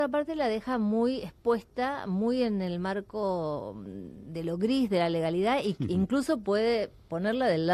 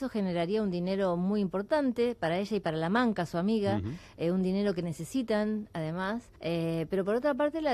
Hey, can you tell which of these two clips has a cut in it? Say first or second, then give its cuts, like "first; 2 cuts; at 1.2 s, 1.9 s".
second; 1 cut; at 6.4 s